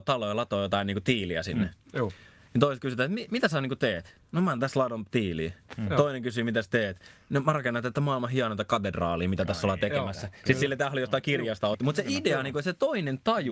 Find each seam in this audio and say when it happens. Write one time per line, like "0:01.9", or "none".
0:11.7